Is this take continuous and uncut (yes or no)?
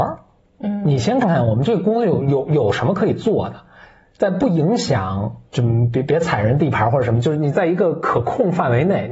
no